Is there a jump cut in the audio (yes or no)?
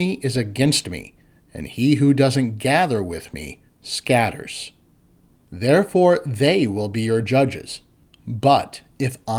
yes